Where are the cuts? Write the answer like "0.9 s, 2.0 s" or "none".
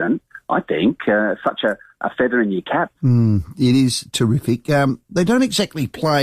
3.0 s